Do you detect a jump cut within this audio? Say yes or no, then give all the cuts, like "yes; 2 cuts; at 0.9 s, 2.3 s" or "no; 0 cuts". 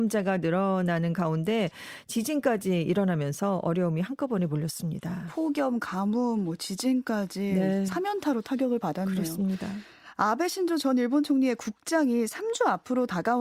no; 0 cuts